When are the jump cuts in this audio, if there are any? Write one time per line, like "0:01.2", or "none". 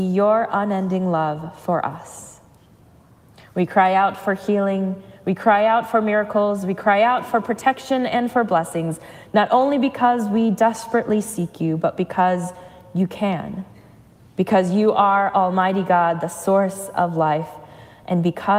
0:03.5